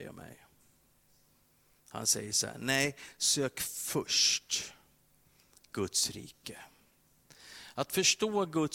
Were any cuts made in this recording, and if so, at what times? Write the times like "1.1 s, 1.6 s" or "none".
none